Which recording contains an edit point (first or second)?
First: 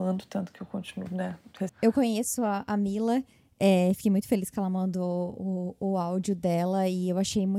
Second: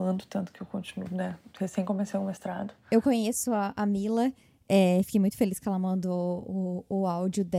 first